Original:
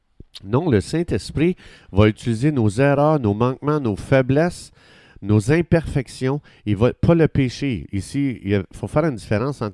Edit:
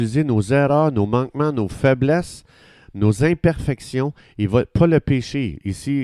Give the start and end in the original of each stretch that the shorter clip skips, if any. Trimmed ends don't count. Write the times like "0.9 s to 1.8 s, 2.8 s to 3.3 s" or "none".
none

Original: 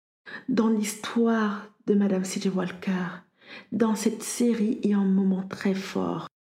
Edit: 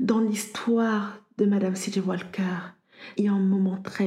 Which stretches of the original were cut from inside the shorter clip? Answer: 3.7 s to 4.8 s

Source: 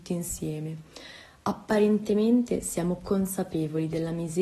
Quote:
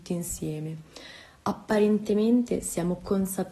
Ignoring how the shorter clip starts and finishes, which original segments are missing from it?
none

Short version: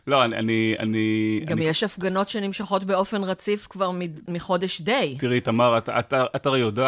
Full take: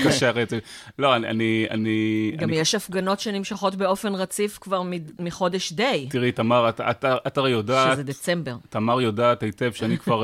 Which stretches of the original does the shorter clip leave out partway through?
none

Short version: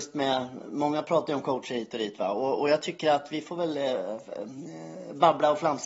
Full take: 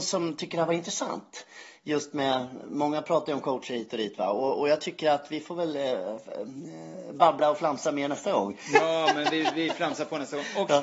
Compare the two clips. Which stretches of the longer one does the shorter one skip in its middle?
none

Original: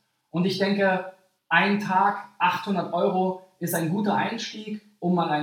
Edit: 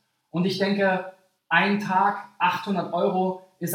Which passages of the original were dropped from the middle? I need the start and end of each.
none

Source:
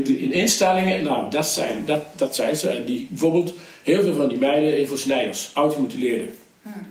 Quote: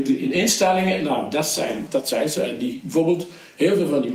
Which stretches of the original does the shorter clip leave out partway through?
1.9 s to 2.1 s

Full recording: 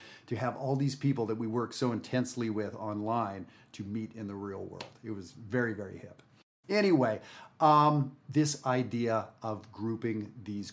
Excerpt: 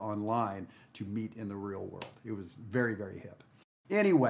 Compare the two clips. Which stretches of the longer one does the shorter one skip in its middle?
none

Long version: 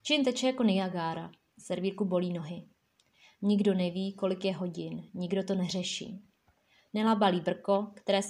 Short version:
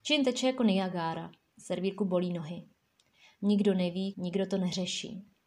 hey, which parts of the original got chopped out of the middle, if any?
4.1 s to 5.1 s

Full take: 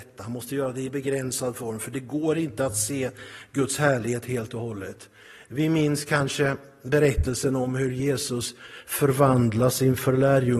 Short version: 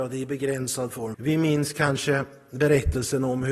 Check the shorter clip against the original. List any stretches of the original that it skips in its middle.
1.8 s to 5.5 s

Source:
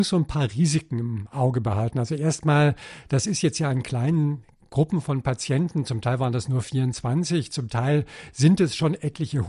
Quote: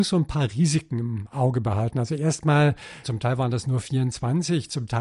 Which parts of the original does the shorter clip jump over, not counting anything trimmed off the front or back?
3.0 s to 5.8 s

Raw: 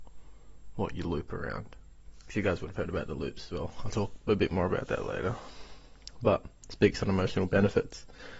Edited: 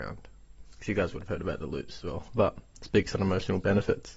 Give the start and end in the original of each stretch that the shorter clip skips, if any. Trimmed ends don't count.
3.8 s to 6.2 s

